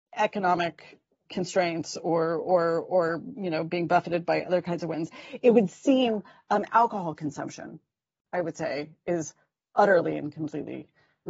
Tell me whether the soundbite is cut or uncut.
cut